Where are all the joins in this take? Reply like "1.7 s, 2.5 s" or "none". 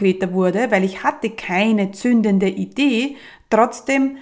none